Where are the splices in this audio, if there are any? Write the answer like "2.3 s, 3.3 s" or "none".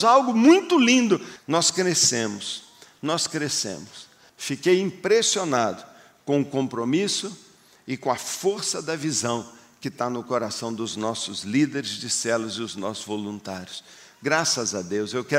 1.4 s, 4.3 s